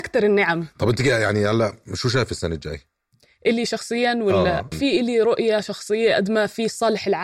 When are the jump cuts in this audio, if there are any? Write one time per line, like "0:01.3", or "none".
0:04.7

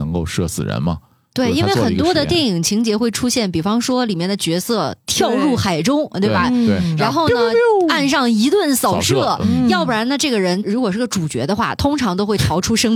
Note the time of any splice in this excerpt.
none

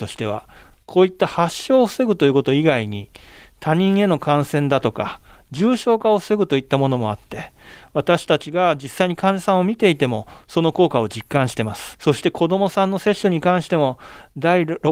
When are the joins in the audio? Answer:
0:11.9

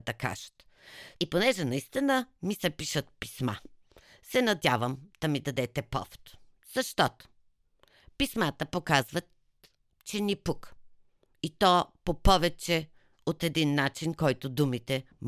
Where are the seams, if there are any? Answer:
0:01.2

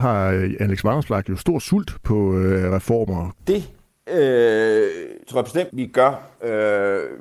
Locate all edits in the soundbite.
0:03.4
0:05.7

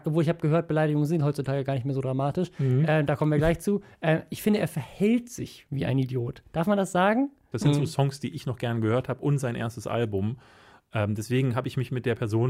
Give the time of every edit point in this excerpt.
0:07.5

